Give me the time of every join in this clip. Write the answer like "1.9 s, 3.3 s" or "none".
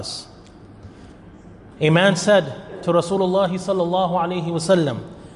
none